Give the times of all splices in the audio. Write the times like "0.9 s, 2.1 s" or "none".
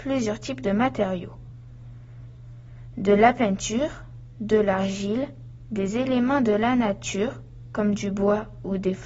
none